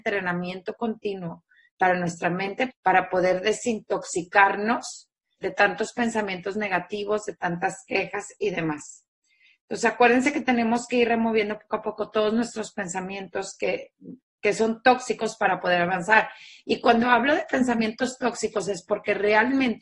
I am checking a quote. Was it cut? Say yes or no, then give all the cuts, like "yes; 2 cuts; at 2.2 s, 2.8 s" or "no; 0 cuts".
yes; 2 cuts; at 2.7 s, 5.4 s